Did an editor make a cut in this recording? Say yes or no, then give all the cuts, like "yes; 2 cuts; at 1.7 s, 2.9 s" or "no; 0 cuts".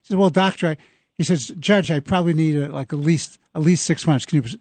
no; 0 cuts